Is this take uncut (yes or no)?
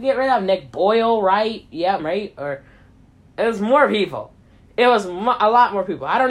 no